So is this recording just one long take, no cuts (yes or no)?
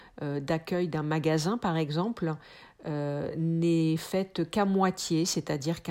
yes